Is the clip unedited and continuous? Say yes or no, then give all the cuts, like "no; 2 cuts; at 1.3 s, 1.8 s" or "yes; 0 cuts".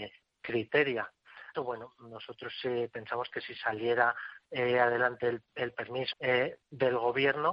no; 2 cuts; at 1.5 s, 6.1 s